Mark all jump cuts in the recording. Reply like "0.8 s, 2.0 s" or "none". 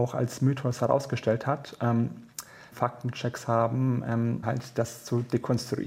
2.7 s, 4.4 s